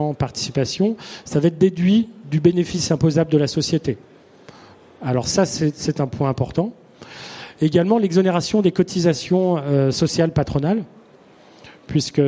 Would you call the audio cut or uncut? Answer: uncut